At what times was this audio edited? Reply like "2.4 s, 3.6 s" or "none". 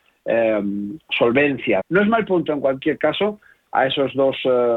1.8 s, 3.7 s